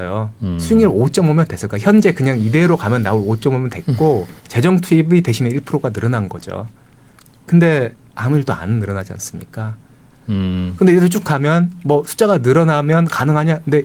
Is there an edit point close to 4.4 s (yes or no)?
yes